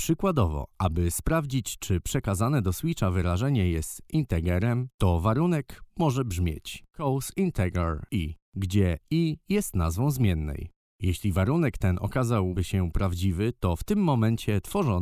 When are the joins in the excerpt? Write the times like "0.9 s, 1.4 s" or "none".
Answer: none